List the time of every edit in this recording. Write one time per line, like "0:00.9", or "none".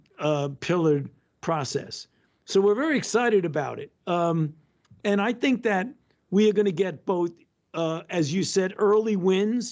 none